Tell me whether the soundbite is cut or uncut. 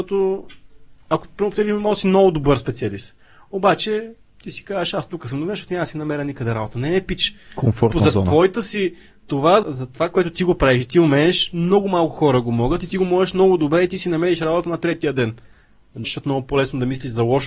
cut